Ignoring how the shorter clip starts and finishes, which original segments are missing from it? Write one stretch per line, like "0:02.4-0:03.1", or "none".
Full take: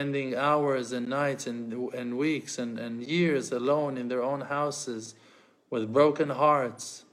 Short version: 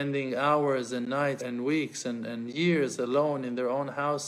0:01.4-0:01.9